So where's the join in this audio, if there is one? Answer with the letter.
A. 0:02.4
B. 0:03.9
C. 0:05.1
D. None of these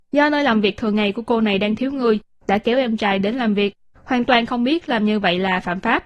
A